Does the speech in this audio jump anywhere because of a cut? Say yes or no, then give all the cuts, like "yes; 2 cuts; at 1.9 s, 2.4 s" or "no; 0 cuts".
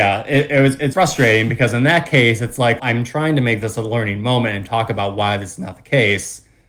yes; 2 cuts; at 0.9 s, 2.8 s